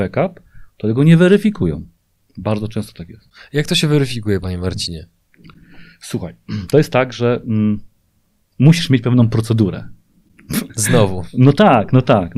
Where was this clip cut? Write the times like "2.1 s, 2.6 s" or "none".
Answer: none